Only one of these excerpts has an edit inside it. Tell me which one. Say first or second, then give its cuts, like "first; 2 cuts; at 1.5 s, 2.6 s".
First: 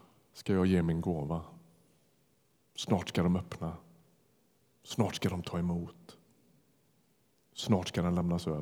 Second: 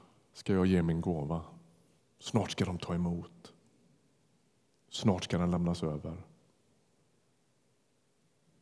second; 1 cut; at 2.0 s